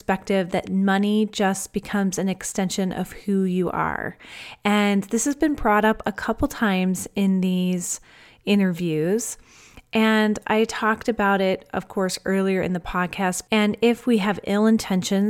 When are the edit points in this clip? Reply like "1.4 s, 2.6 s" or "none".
13.5 s